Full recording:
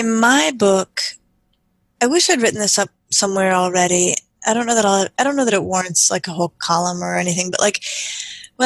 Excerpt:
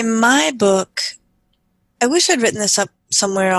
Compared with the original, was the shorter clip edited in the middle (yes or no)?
no